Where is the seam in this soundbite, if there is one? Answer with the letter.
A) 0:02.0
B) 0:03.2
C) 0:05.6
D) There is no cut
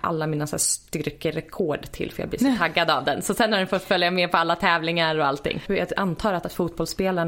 C